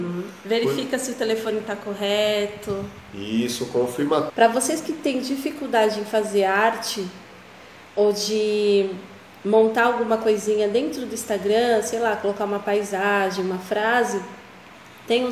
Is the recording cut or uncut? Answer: cut